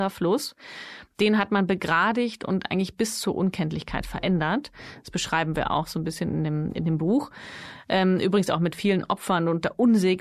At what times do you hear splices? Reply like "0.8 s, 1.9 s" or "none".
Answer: none